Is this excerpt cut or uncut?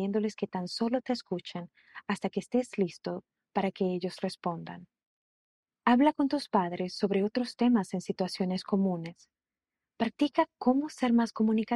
uncut